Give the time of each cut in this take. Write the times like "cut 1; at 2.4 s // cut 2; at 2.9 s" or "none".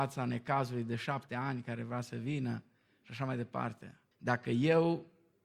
cut 1; at 4.1 s